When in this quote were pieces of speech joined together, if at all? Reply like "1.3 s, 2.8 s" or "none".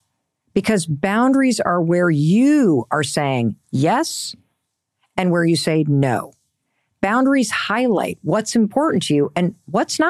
none